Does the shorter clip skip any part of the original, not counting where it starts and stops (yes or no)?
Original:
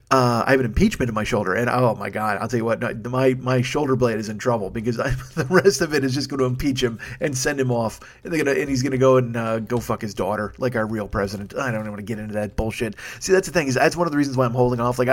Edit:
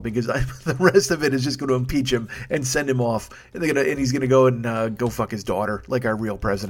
no